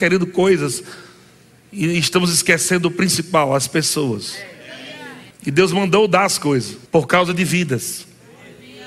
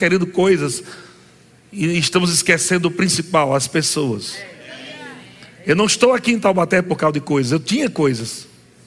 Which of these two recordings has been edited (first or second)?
first